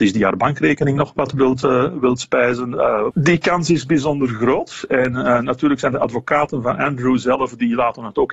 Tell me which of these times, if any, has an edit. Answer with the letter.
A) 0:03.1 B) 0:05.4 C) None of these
A